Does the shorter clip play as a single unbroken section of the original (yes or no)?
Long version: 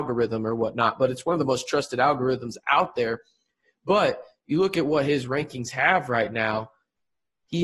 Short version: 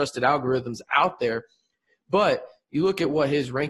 yes